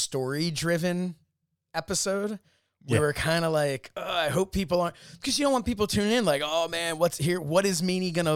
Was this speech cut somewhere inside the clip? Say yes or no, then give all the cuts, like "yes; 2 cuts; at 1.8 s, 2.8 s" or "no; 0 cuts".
no; 0 cuts